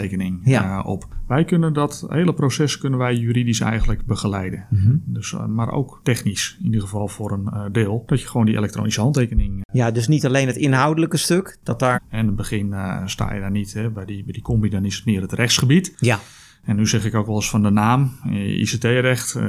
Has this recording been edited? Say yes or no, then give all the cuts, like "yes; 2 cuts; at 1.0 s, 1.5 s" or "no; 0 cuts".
yes; 1 cut; at 11.9 s